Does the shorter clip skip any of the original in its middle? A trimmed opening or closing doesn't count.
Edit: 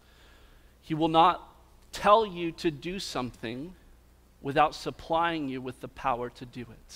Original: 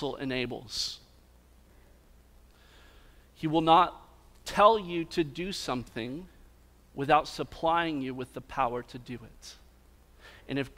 no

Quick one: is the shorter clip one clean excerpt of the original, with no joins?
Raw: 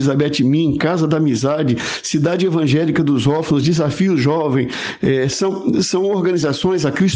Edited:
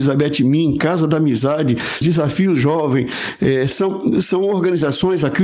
no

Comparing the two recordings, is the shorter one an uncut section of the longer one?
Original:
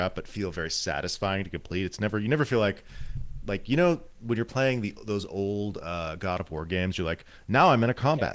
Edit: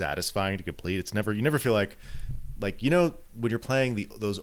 yes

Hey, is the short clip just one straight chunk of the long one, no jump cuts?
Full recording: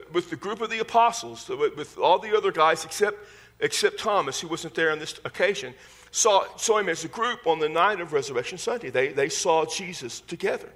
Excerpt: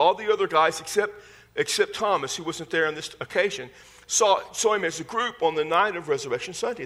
yes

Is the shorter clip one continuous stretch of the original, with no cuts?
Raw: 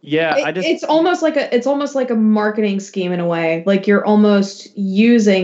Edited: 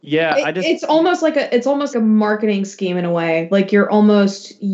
no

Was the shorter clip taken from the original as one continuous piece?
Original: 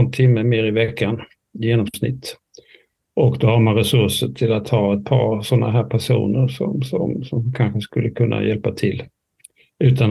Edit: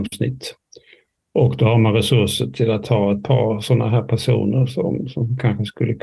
no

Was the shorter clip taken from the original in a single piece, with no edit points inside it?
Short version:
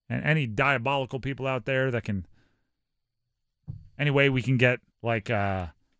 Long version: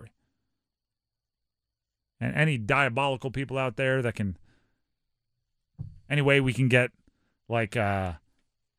no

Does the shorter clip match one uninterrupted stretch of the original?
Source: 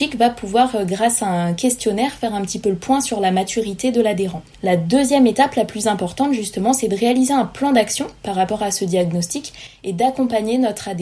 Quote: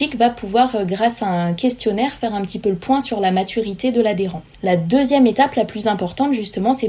yes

